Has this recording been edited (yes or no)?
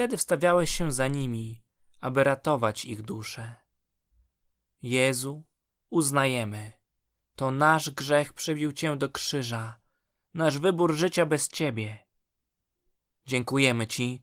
no